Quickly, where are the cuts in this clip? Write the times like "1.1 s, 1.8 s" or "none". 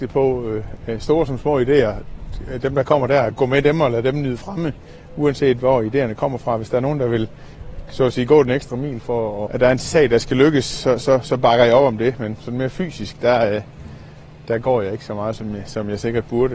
9.5 s